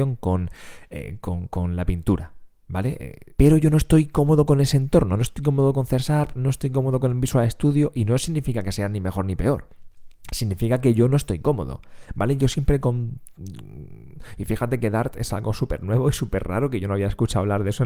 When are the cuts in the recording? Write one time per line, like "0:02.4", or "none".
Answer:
0:03.4